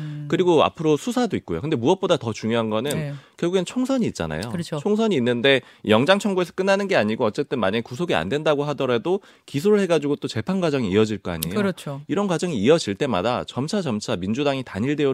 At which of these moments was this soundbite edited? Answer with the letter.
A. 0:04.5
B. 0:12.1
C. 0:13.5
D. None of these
D